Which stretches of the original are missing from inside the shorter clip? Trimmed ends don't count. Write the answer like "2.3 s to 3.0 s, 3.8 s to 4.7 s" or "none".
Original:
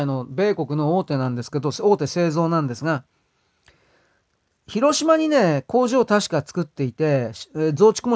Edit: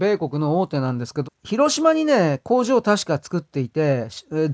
1.6 s to 4.5 s